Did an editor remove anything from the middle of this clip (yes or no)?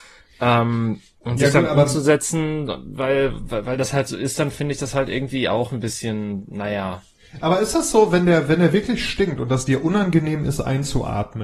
no